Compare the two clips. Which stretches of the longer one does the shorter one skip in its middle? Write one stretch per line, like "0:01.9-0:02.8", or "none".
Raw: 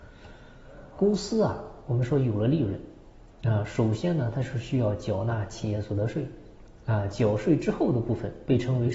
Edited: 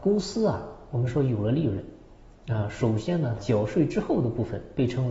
0:04.3-0:07.1